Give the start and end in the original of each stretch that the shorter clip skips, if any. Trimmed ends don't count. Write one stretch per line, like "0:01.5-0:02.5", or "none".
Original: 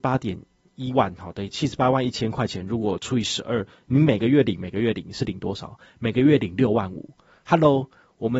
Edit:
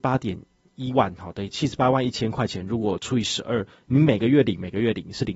none